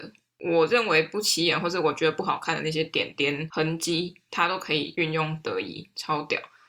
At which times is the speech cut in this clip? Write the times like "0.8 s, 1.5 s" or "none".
none